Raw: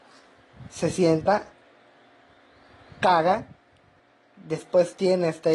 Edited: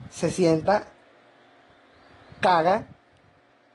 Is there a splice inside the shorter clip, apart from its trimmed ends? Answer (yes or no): no